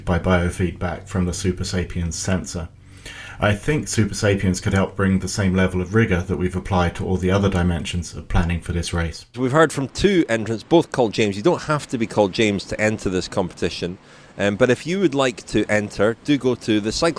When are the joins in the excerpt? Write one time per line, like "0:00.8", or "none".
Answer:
0:09.3